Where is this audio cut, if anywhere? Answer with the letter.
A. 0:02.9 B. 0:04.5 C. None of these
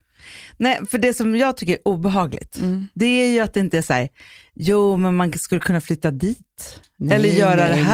C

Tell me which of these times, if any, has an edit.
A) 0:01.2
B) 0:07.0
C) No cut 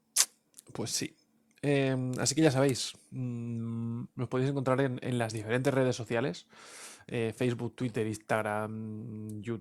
C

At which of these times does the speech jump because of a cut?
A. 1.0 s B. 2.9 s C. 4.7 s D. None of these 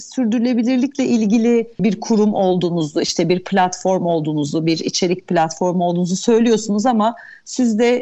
D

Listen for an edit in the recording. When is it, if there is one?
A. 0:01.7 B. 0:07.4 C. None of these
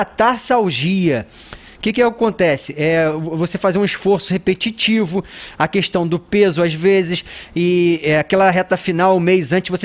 C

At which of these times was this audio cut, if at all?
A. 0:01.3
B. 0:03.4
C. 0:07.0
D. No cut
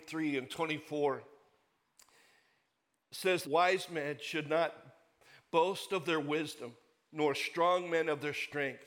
B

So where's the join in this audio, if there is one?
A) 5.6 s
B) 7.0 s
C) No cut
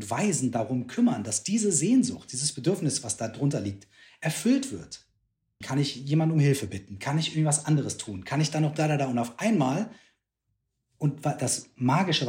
A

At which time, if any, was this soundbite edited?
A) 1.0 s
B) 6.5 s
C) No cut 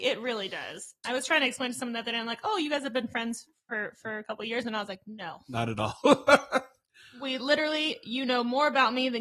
A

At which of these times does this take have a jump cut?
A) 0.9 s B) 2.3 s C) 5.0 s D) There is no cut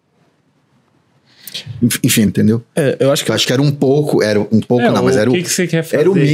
B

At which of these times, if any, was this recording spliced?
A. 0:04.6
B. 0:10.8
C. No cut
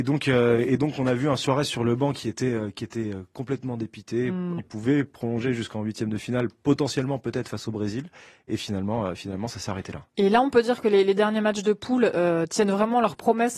A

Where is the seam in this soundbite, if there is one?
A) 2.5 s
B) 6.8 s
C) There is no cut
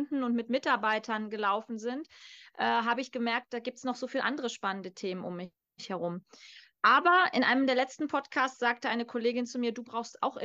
C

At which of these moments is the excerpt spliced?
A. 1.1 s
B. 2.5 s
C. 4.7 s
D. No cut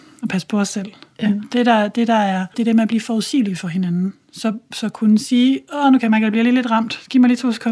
B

